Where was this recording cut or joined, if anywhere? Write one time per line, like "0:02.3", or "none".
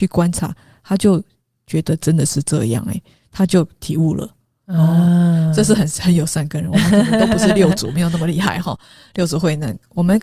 none